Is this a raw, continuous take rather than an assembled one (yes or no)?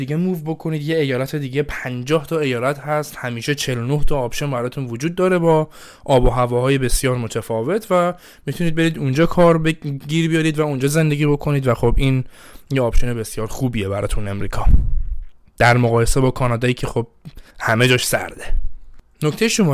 no